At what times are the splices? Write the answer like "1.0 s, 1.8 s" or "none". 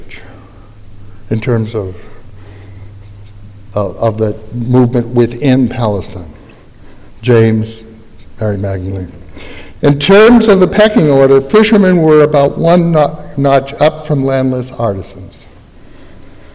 none